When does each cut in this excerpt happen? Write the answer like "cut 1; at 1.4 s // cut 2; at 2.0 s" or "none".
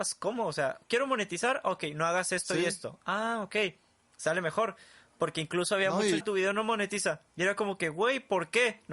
cut 1; at 6.2 s // cut 2; at 7.3 s